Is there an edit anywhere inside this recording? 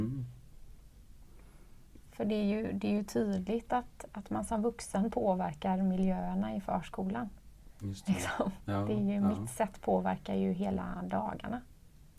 no; 0 cuts

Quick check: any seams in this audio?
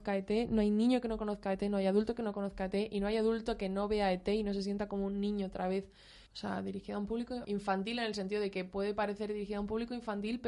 yes; 2 cuts; at 6.3 s, 7.4 s

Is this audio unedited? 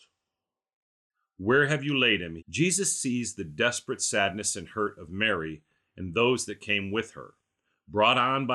no; 1 cut; at 2.4 s

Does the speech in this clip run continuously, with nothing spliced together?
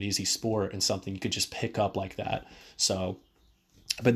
yes; 0 cuts

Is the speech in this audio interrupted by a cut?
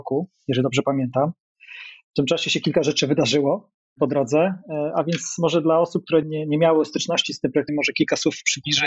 yes; 2 cuts; at 6.2 s, 7.7 s

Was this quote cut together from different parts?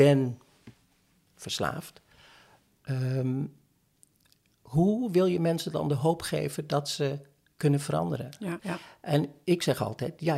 yes; 1 cut; at 8.6 s

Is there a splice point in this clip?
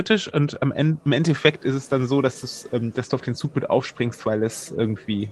no; 0 cuts

